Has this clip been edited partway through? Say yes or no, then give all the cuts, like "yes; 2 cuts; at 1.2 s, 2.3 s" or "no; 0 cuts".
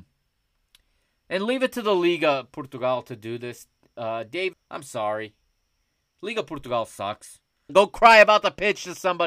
yes; 2 cuts; at 4.5 s, 7.7 s